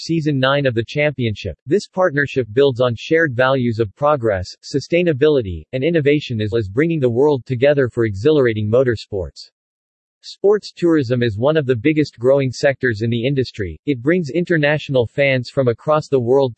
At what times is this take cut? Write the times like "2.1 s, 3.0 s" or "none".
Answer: 6.5 s, 10.1 s

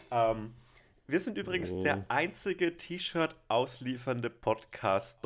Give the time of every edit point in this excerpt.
none

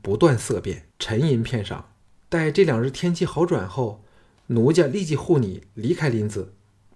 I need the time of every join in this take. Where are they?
0.9 s, 2.2 s

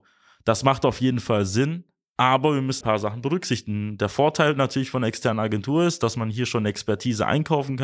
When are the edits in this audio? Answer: 2.8 s

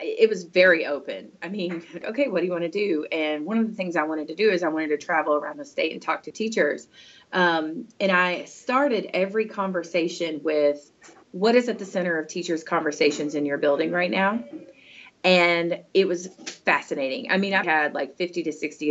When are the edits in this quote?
2.0 s, 11.2 s, 17.6 s

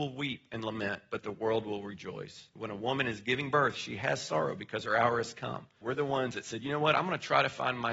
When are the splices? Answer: 2.6 s, 5.8 s

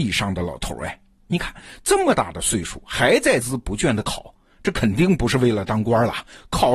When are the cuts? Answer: 3.4 s

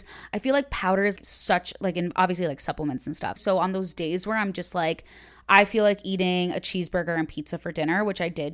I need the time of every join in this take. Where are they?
1.2 s, 3.4 s

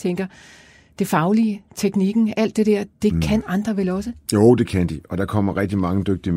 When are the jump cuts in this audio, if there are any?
none

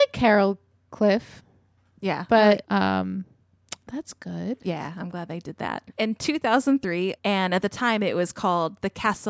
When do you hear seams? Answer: 2.6 s, 7.2 s

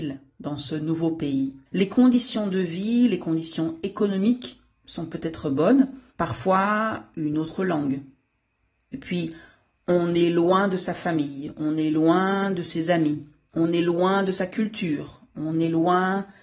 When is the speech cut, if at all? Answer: 1.7 s, 6.1 s

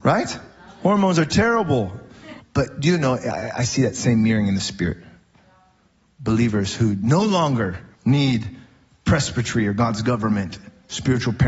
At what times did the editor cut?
2.4 s, 7.9 s

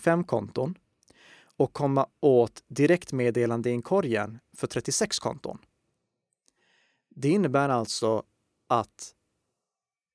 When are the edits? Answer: none

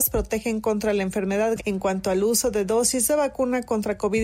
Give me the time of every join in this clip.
1.6 s

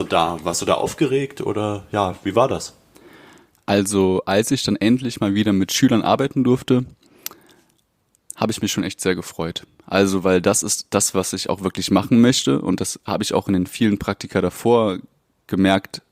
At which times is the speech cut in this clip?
none

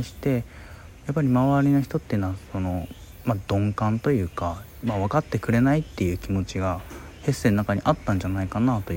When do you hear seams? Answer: none

